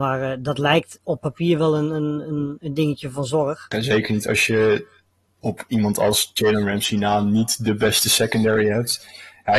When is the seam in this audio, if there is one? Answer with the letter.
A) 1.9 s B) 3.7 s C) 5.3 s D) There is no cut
B